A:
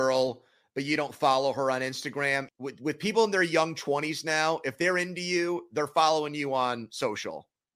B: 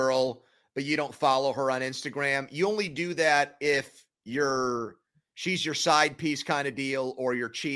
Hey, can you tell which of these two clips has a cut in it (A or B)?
A